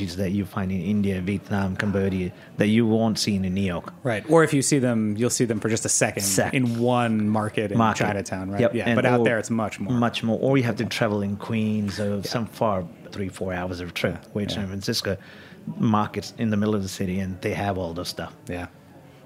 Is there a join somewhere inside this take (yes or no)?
yes